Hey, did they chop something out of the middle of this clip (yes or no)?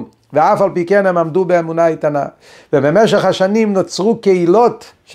no